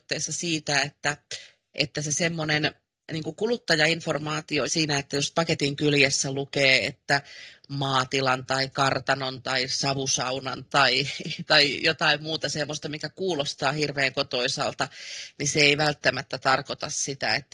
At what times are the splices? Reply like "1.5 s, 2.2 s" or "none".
4.7 s